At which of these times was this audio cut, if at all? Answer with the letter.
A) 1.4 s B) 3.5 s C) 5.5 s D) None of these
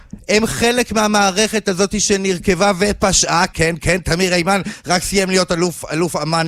B